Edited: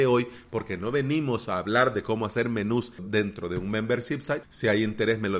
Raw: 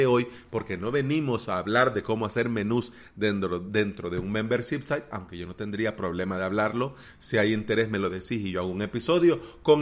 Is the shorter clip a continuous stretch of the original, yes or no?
no